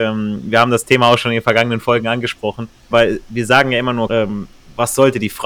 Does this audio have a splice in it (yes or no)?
yes